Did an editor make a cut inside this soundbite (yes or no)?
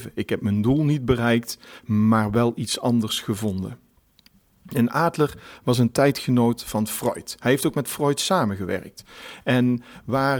no